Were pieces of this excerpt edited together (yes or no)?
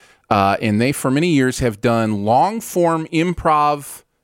no